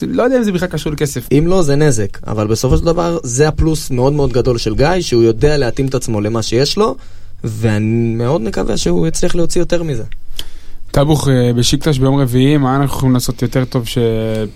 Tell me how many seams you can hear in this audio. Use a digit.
1